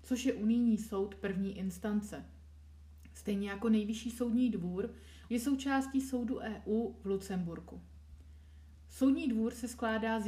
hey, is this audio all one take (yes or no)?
no